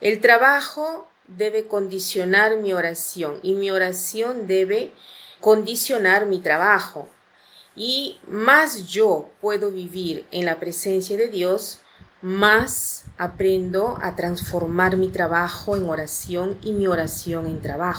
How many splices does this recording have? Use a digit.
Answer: 1